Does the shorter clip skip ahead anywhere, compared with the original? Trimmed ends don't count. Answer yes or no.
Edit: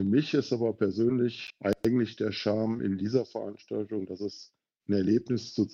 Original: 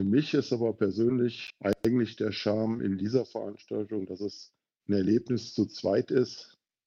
no